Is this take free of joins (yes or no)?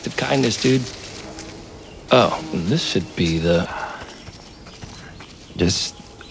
no